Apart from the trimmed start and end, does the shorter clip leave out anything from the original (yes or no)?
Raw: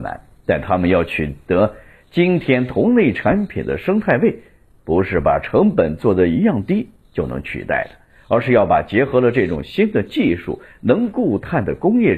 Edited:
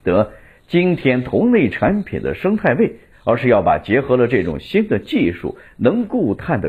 yes